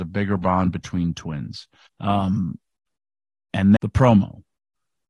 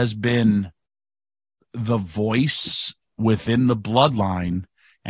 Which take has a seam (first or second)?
first